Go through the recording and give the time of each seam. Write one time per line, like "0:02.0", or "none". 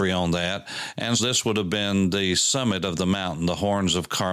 0:01.2